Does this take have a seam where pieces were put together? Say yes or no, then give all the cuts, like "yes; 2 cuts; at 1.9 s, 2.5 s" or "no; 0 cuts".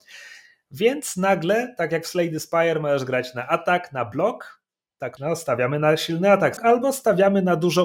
yes; 2 cuts; at 5.2 s, 6.6 s